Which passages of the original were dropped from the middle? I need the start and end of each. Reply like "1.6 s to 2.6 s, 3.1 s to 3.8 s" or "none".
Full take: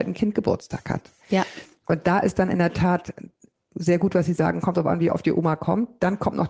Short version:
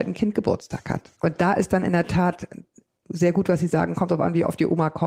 1.1 s to 1.8 s